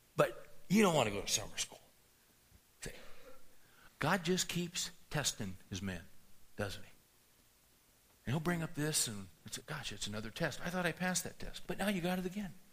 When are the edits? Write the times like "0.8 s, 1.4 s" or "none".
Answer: 3.9 s, 9.6 s, 11.7 s